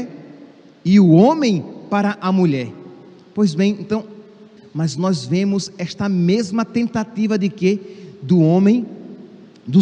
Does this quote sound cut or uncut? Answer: cut